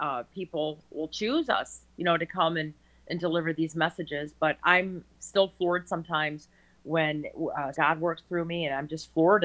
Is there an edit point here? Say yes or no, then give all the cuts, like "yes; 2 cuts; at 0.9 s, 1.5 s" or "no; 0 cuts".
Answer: yes; 1 cut; at 7.7 s